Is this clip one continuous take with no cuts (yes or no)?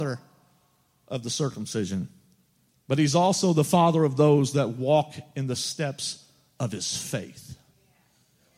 yes